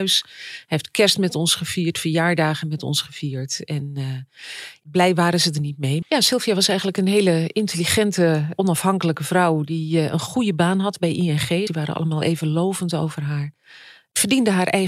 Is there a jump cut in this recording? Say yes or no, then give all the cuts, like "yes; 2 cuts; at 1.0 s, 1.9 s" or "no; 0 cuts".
yes; 2 cuts; at 6.0 s, 11.7 s